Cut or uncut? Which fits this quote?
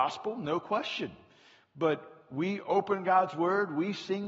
uncut